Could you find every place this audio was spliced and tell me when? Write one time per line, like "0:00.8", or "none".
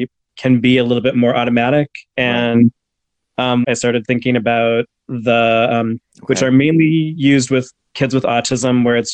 0:03.6
0:06.0